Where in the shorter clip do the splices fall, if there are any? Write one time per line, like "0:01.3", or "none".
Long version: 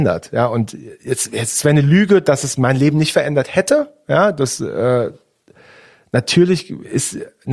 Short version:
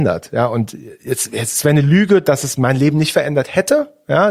none